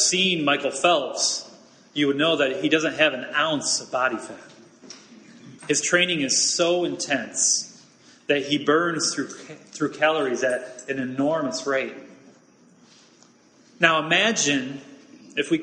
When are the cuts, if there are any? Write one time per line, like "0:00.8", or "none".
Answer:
0:05.6